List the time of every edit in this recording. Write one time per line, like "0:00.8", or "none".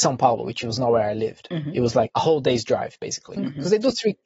0:02.1
0:03.4